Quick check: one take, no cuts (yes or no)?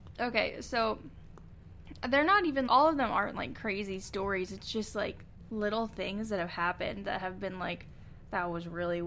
no